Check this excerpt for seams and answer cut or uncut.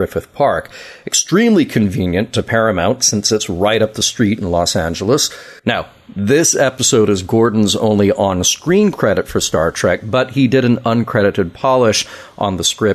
cut